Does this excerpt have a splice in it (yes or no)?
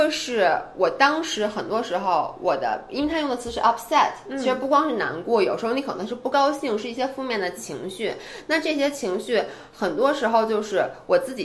no